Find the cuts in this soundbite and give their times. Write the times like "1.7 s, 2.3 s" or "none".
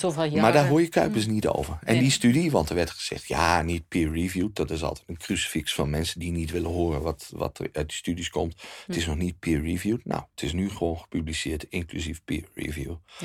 none